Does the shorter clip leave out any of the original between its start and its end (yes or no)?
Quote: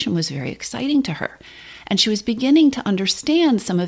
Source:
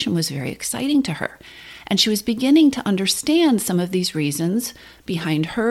no